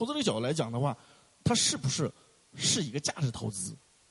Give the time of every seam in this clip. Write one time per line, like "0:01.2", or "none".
none